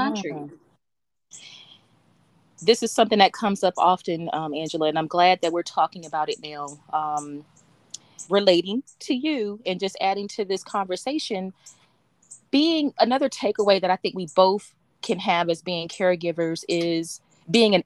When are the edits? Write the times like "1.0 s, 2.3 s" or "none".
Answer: 8.3 s, 13.0 s